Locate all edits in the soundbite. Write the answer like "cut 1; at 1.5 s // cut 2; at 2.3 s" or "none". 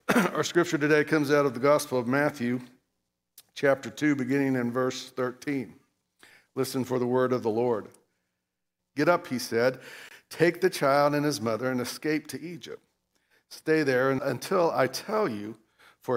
cut 1; at 8.8 s // cut 2; at 14.2 s